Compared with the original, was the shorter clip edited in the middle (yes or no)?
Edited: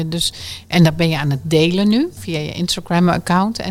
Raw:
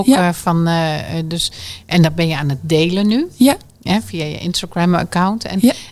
yes